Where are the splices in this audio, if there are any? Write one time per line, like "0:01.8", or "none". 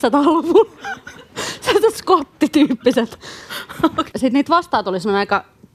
0:04.1